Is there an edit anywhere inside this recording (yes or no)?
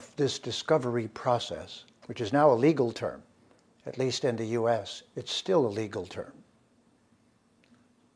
no